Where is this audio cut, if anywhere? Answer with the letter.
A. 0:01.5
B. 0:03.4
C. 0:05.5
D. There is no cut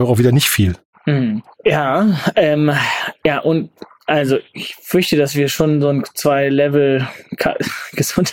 D